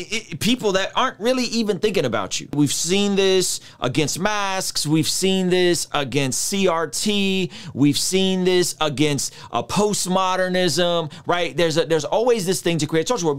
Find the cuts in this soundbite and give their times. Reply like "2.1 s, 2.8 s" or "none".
none